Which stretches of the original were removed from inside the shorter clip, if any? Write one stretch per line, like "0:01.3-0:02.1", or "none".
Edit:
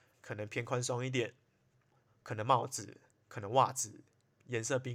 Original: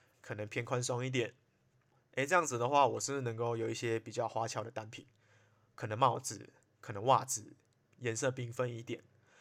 0:02.1-0:05.6